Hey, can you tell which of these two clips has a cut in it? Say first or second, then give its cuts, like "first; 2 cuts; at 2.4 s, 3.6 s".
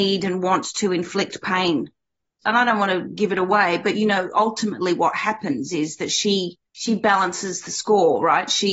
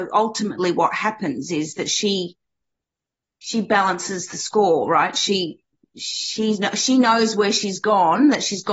first; 2 cuts; at 2.4 s, 6.7 s